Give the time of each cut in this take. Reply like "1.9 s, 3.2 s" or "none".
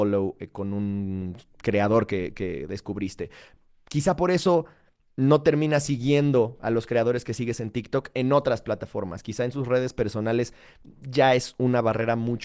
none